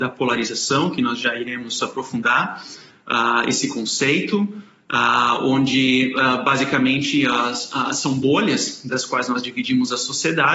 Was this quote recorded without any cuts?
yes; 0 cuts

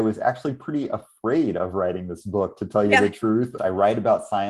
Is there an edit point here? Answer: yes; 1 cut; at 3.6 s

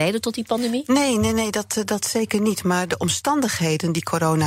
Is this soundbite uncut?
yes; 0 cuts

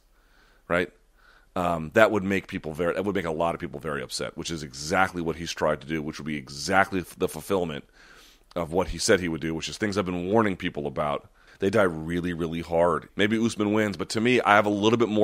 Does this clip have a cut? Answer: yes; 2 cuts; at 11.5 s, 13.1 s

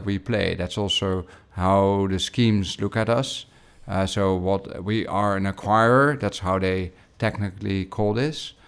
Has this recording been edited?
no; 0 cuts

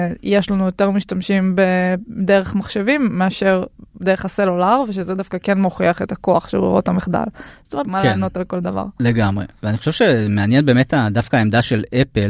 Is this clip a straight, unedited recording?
no; 1 cut; at 7.8 s

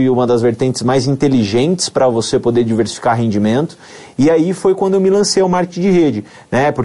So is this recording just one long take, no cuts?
yes; 0 cuts

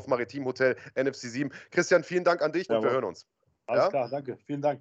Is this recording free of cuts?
no; 1 cut; at 2.7 s

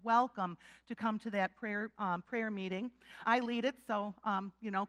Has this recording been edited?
yes; 1 cut; at 3.2 s

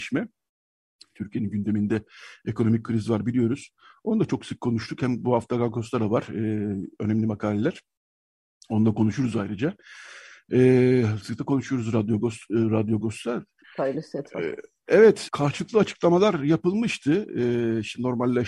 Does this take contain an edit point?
yes; 3 cuts; at 11.2 s, 13.6 s, 15.3 s

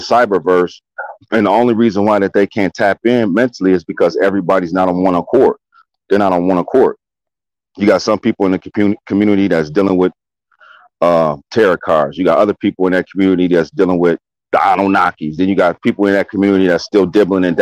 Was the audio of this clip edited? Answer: no; 0 cuts

